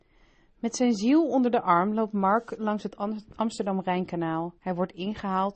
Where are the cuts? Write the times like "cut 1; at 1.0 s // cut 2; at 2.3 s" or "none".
cut 1; at 4.6 s